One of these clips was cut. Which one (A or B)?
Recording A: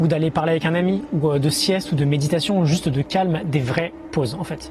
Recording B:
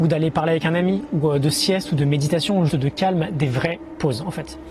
B